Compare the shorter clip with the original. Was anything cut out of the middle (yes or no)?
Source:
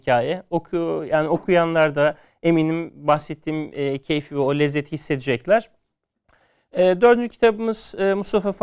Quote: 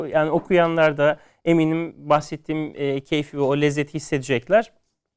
no